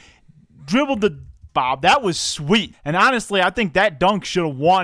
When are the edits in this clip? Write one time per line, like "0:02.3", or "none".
0:01.5
0:02.7